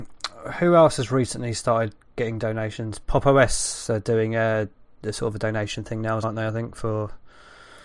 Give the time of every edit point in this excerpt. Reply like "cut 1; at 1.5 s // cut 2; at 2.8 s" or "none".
cut 1; at 6.2 s

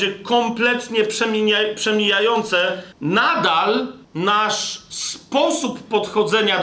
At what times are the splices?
cut 1; at 2.9 s // cut 2; at 4.0 s

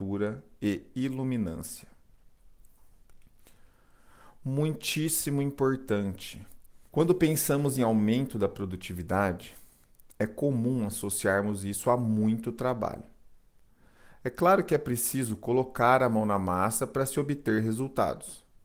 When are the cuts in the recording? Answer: cut 1; at 6.9 s

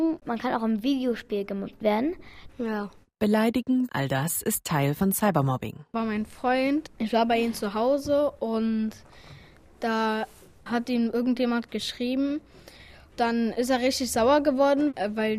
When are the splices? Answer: cut 1; at 2.5 s // cut 2; at 3.9 s

